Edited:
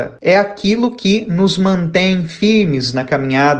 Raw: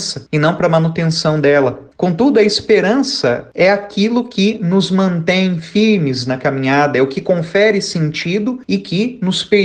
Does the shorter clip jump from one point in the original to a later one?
no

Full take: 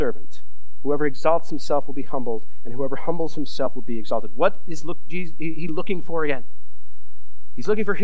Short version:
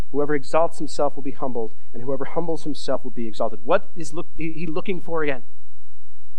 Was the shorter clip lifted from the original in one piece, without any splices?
no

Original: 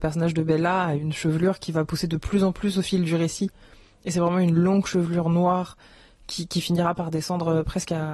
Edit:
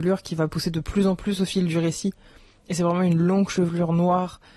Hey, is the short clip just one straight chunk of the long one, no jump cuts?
yes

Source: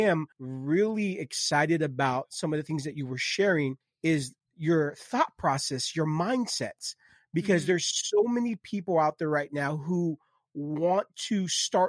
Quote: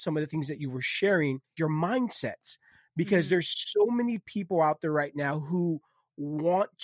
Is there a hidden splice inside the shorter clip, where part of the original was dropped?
yes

